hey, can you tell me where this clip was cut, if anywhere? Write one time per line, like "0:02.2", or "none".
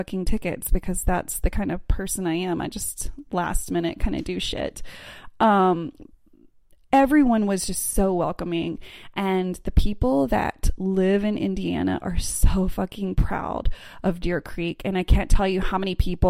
none

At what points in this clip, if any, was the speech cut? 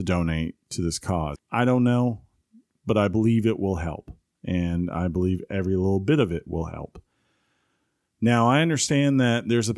0:01.4

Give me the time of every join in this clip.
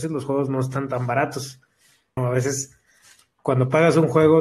0:02.2

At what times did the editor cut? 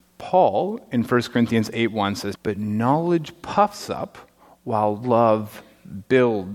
0:02.3

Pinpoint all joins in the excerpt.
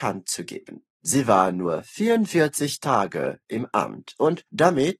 0:00.9

